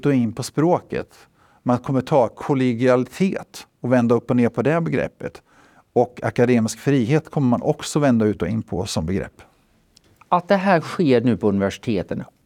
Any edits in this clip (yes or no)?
no